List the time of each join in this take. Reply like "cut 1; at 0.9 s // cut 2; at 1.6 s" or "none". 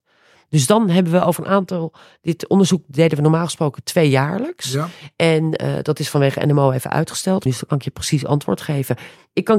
cut 1; at 7.5 s